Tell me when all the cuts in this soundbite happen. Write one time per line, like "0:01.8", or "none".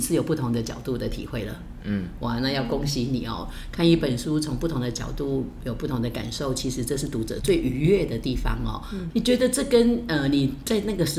0:07.4
0:09.1